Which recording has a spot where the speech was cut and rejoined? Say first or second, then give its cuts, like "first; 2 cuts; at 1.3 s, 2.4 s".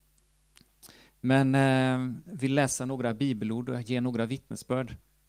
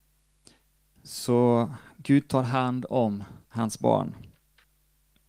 second; 1 cut; at 3.4 s